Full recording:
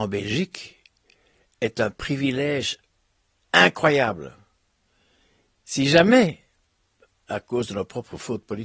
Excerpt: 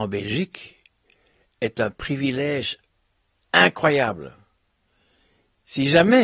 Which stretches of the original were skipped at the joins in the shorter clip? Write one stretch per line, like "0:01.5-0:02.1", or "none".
none